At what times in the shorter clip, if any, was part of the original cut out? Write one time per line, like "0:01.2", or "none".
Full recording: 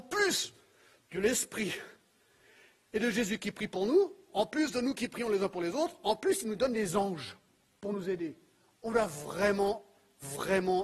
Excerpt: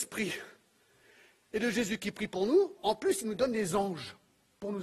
0:02.8